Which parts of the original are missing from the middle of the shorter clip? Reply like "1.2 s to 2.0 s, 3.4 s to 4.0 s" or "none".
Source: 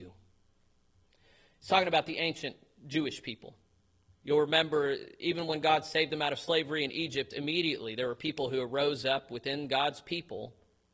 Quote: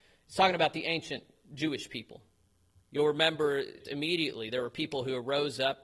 5.1 s to 7.3 s